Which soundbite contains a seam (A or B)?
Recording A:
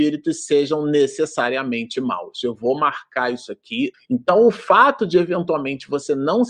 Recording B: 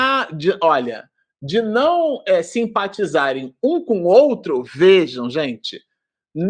A